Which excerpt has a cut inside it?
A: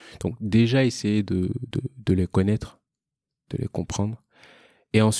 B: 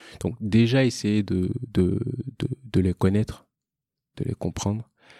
A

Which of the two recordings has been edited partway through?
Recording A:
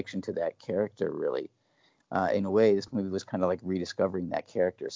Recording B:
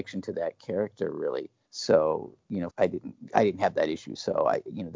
B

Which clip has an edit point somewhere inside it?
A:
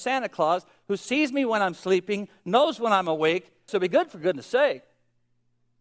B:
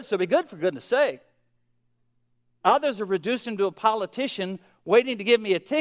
A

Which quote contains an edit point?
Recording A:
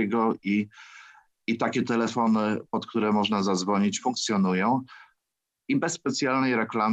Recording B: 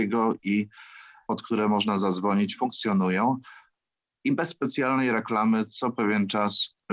B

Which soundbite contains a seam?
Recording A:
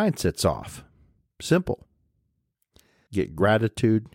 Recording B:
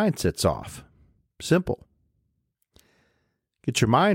A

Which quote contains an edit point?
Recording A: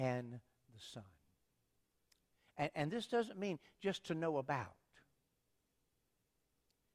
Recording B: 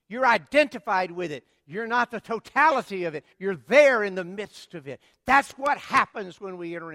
B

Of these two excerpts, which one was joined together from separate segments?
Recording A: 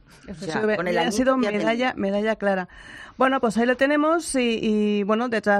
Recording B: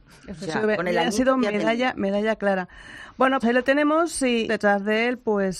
B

